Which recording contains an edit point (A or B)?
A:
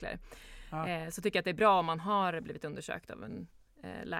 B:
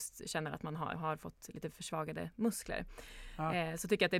B